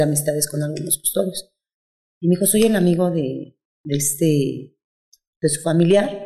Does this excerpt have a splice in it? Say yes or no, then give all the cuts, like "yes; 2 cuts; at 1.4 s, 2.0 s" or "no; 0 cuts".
no; 0 cuts